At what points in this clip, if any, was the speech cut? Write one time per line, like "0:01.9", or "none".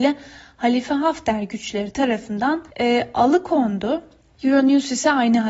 0:02.7